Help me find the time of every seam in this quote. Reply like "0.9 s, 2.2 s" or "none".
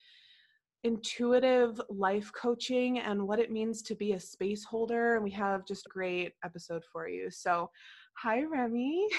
5.9 s